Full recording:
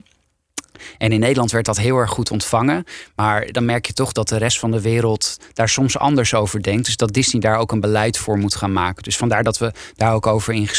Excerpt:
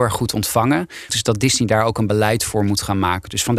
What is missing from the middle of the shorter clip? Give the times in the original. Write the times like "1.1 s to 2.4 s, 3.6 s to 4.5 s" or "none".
3.1 s to 6.8 s